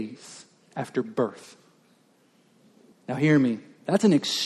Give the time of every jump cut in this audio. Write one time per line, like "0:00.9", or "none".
0:02.9